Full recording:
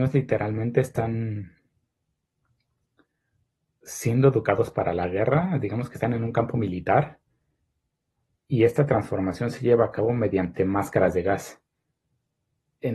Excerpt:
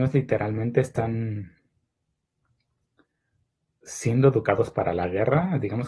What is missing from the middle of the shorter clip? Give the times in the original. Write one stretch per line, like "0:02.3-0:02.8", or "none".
none